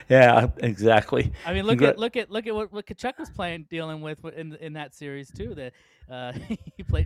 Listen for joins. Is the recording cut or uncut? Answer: uncut